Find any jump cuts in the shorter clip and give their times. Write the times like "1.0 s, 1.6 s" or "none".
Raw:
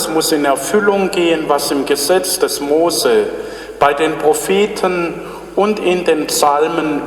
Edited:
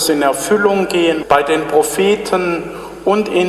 1.2 s